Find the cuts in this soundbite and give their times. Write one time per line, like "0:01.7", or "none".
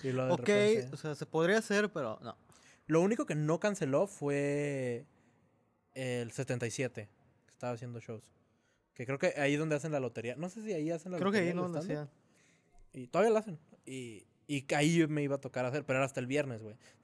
none